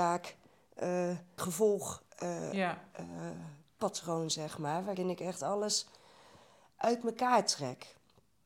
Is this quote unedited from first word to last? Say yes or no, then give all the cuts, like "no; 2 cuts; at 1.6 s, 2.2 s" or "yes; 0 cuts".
no; 1 cut; at 1.4 s